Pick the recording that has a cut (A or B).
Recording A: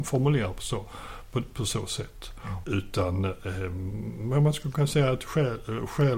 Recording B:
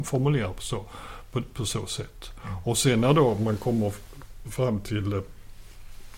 A